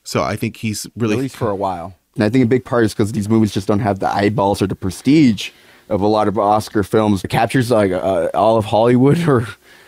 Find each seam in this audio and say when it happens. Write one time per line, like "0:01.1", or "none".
0:02.2
0:07.2